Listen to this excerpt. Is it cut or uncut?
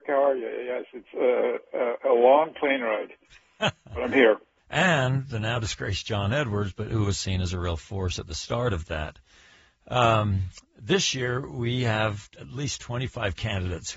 cut